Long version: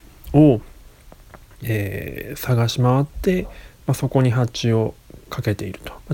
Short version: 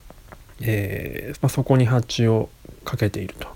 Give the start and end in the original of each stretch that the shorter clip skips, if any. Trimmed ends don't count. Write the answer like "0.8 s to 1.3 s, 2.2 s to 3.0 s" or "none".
2.4 s to 3.8 s